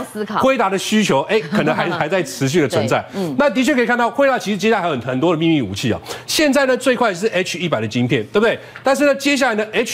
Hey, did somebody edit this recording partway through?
no; 0 cuts

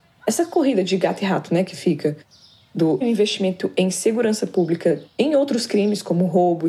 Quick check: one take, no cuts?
no; 1 cut; at 3.0 s

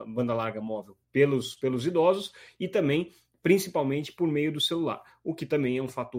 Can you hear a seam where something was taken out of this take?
yes; 1 cut; at 1.0 s

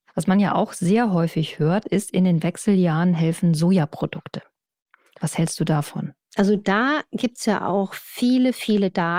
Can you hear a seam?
no; 0 cuts

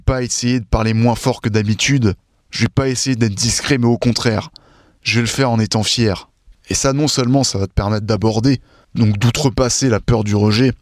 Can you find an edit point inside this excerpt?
yes; 1 cut; at 6.5 s

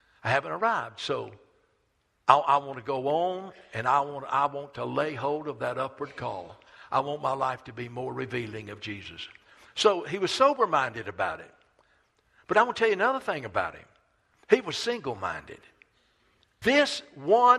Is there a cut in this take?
yes; 1 cut; at 16.6 s

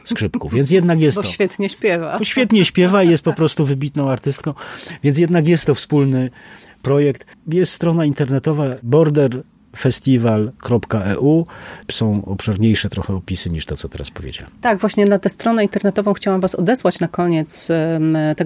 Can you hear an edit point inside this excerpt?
yes; 2 cuts; at 7.3 s, 11.8 s

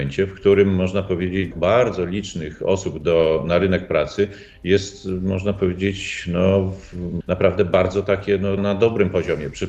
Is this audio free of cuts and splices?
no; 3 cuts; at 1.5 s, 7.2 s, 8.6 s

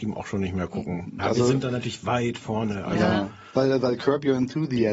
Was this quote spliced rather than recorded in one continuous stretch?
yes; 1 cut; at 1.2 s

